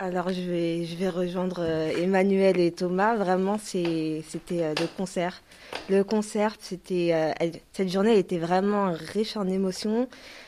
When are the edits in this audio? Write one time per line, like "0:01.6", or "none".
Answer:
none